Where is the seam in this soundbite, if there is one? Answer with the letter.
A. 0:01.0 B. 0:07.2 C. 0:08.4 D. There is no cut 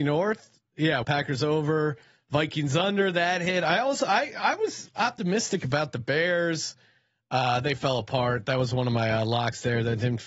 A